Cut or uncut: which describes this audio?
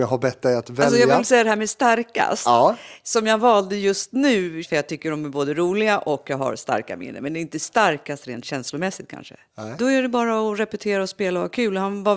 cut